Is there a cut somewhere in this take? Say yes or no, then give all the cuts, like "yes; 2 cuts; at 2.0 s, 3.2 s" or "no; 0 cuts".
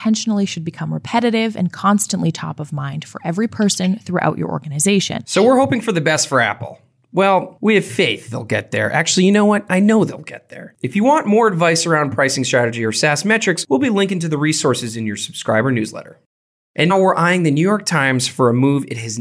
yes; 3 cuts; at 5.2 s, 10.7 s, 16.9 s